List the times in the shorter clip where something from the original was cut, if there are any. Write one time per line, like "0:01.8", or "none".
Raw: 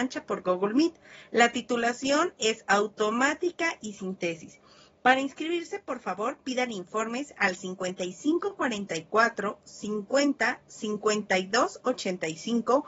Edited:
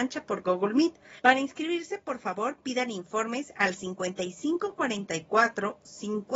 0:01.2